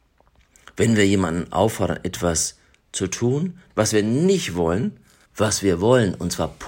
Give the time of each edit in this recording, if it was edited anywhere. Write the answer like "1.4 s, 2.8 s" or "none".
3.7 s, 5.3 s